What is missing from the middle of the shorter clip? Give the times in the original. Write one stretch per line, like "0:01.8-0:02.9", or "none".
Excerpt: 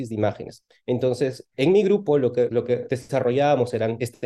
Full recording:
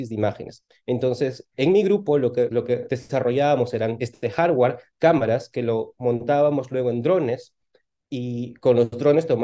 none